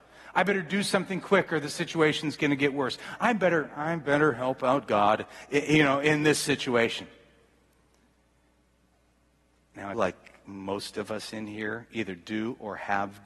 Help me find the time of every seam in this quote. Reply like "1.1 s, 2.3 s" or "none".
3.2 s, 9.9 s

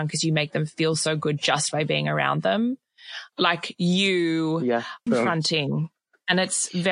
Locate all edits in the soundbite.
3.3 s, 5.1 s

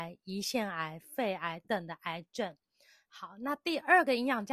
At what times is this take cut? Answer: 1.6 s

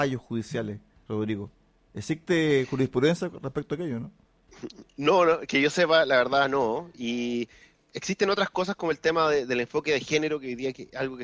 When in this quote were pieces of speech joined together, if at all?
none

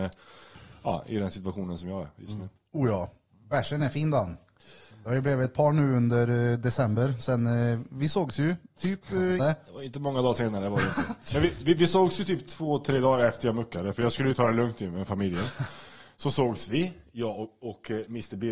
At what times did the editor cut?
9.4 s

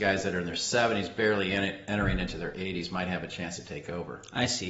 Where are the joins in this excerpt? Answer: none

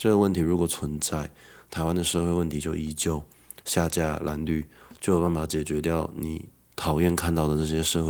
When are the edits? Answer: 3.6 s

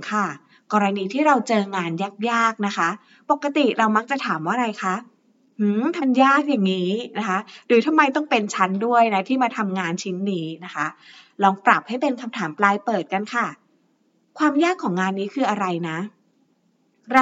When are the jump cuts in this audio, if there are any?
6.0 s

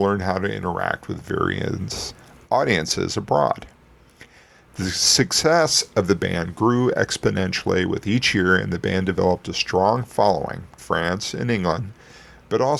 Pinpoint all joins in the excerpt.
10.8 s

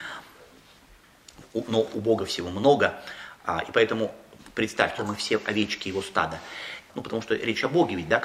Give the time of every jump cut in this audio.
5.0 s, 6.9 s

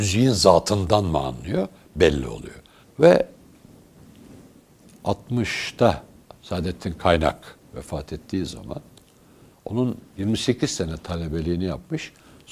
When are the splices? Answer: 2.8 s

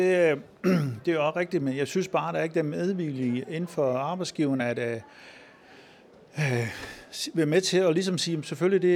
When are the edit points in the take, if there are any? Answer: none

